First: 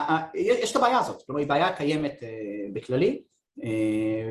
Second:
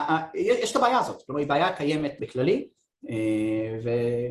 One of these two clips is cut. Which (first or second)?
second